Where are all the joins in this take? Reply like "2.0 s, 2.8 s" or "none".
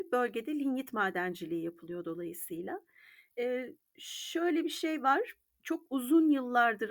5.6 s